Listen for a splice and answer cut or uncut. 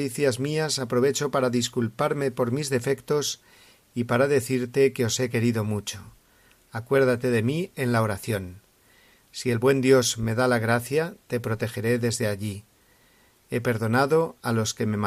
uncut